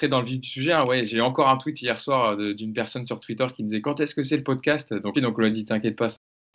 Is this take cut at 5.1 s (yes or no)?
yes